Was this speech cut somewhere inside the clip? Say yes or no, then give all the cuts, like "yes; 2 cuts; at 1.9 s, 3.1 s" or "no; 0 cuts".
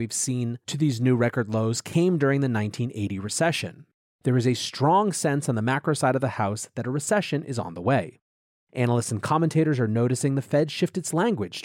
yes; 1 cut; at 4.0 s